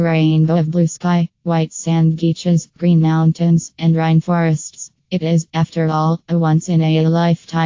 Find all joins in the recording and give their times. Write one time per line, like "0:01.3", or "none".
0:05.0